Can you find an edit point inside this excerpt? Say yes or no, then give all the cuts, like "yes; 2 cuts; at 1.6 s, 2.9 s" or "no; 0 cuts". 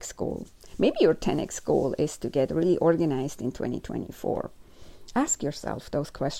yes; 1 cut; at 5.1 s